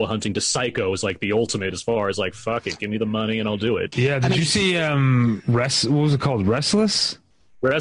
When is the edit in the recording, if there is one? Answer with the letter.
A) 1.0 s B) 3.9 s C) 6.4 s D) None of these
B